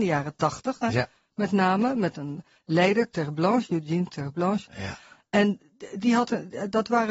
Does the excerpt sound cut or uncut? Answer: uncut